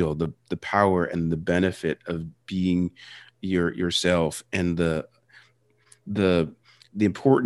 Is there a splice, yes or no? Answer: no